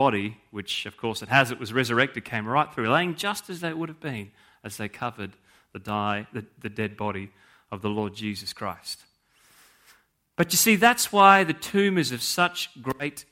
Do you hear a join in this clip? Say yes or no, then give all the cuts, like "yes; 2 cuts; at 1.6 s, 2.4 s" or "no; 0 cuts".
no; 0 cuts